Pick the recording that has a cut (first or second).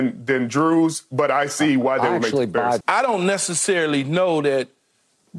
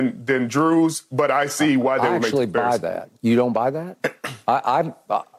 first